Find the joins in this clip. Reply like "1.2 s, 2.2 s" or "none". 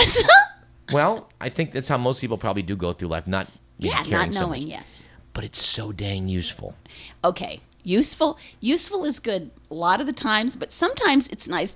none